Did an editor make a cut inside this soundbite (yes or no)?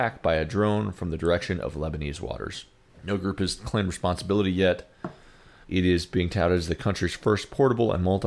yes